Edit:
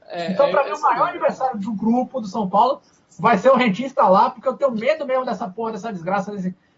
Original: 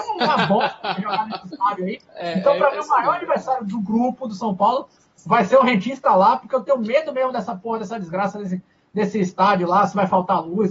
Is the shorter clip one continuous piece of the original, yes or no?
yes